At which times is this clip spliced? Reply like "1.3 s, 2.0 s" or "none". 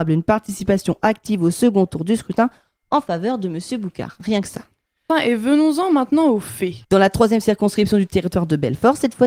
5.1 s, 6.8 s